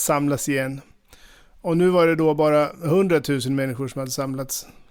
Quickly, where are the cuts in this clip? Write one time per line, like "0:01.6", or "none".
none